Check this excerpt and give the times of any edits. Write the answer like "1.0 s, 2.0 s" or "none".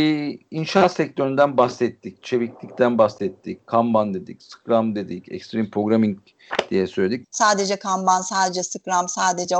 7.2 s